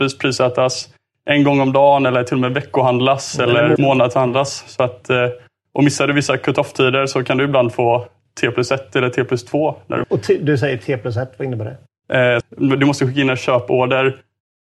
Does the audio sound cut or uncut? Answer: cut